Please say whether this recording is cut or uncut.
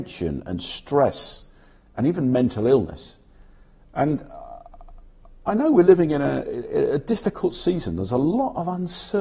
uncut